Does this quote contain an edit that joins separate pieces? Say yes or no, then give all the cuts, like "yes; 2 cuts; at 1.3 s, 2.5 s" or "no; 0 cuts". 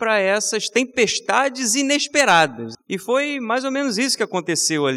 yes; 1 cut; at 2.7 s